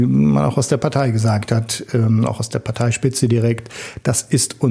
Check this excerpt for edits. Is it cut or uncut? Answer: uncut